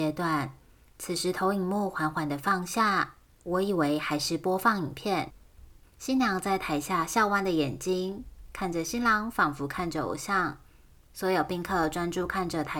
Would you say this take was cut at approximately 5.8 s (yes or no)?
yes